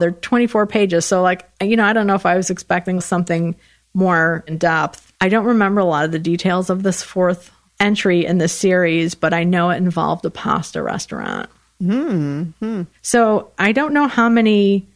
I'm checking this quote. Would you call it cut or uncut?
cut